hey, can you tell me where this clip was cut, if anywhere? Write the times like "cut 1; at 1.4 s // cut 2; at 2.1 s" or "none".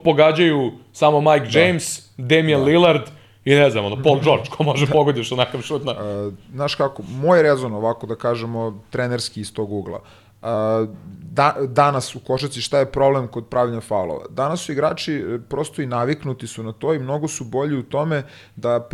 none

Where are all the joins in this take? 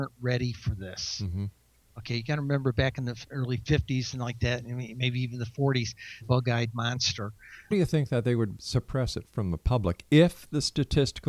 cut 1; at 6.2 s // cut 2; at 7.7 s

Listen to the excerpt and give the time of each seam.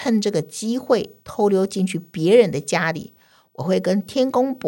none

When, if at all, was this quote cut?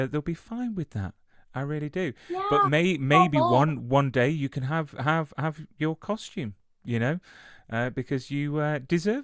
none

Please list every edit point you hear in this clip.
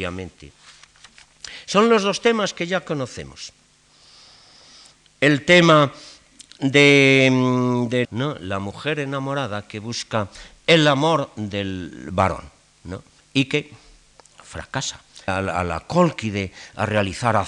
cut 1; at 8.0 s // cut 2; at 15.3 s

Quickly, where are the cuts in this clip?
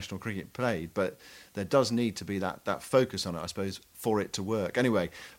none

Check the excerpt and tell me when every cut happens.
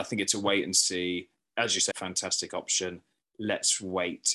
cut 1; at 1.9 s

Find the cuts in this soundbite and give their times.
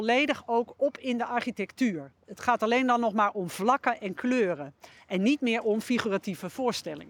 none

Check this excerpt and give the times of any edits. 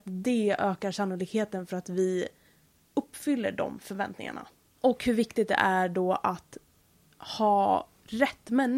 cut 1; at 4.8 s

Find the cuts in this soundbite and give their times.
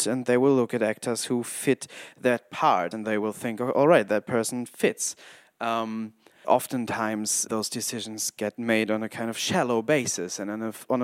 cut 1; at 2.9 s // cut 2; at 6.4 s // cut 3; at 7.5 s

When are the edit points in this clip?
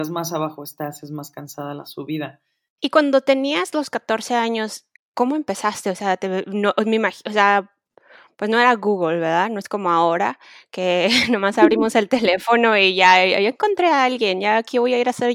cut 1; at 2.8 s // cut 2; at 5.0 s

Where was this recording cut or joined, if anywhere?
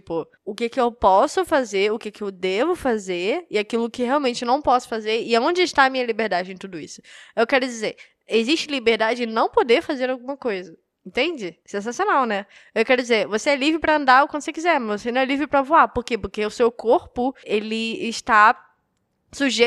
cut 1; at 17.4 s

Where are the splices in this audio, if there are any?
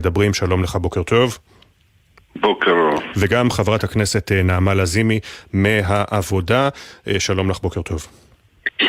none

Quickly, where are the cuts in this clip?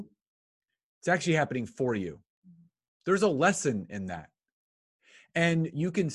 none

